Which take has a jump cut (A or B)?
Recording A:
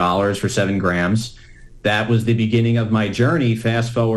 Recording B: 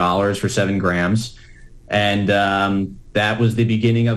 A